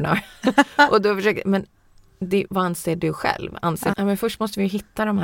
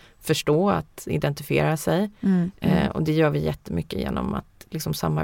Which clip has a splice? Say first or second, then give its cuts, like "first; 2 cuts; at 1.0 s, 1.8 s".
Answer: first; 2 cuts; at 2.5 s, 3.9 s